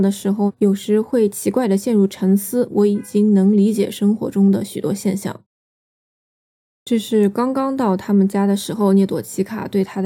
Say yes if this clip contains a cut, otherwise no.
yes